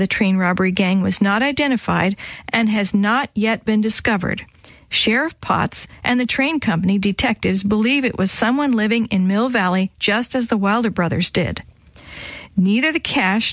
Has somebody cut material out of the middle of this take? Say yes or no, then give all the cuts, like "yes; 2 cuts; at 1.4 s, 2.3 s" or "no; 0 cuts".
no; 0 cuts